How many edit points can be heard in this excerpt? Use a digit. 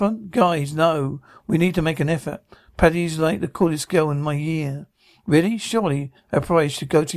0